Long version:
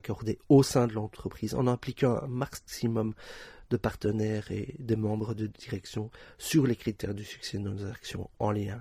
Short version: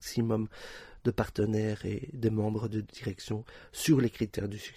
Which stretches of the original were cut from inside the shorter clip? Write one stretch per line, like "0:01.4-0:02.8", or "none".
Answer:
none